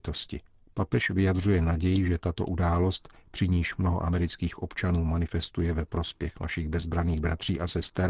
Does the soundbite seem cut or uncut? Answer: uncut